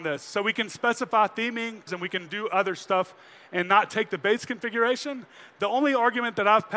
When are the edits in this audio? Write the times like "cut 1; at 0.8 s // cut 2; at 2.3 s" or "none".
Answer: cut 1; at 1.9 s